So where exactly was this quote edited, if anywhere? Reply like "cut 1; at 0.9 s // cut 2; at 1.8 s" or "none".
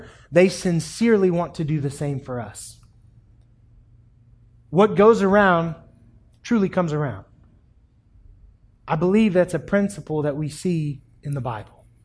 none